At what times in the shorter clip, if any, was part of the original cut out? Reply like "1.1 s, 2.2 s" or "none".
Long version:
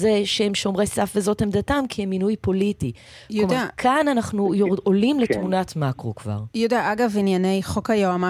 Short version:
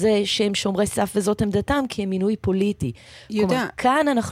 none